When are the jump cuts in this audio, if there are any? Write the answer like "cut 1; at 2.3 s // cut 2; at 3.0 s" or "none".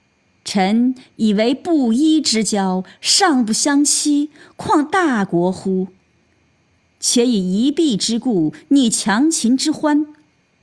none